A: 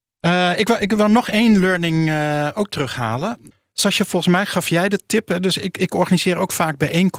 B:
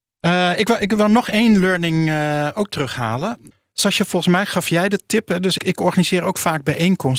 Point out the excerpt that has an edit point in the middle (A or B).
B